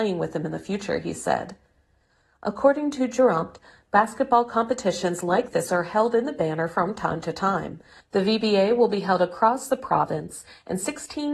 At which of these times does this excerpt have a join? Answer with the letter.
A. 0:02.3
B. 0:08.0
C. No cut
B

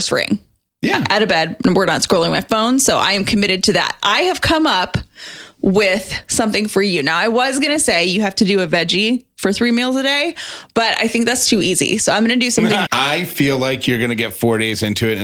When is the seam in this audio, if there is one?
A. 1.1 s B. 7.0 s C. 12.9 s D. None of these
C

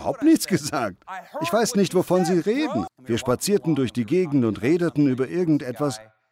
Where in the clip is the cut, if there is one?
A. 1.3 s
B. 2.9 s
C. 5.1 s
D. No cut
B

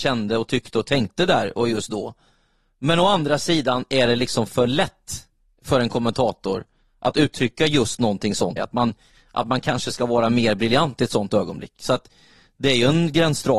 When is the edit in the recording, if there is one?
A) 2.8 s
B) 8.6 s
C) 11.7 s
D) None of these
B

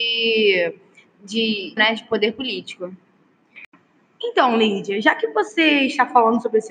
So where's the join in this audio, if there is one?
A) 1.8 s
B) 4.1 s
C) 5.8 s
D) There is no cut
A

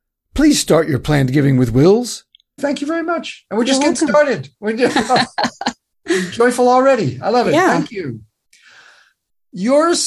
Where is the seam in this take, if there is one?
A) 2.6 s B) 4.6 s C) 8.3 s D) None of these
A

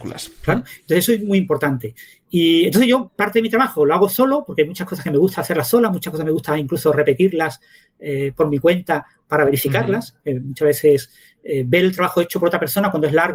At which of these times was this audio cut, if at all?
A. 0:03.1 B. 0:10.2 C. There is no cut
A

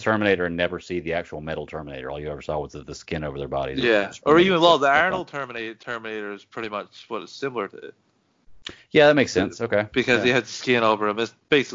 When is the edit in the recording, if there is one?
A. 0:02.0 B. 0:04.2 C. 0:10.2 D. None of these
D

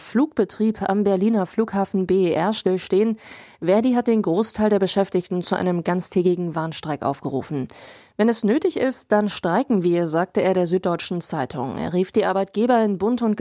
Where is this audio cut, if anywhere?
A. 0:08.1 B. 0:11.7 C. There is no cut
A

